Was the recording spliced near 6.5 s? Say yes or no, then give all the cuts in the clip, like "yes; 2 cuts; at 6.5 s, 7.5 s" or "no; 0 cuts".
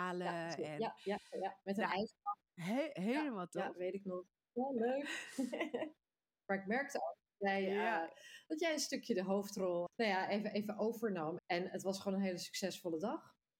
yes; 3 cuts; at 6.5 s, 9.9 s, 11.4 s